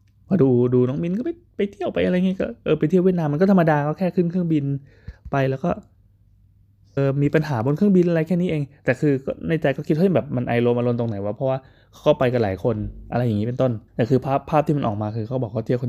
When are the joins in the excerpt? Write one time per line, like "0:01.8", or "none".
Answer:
0:07.0
0:13.9